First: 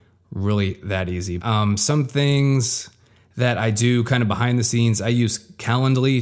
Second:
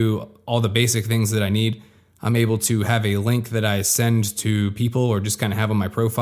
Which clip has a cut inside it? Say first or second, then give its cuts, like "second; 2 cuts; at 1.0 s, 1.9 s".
first; 1 cut; at 1.4 s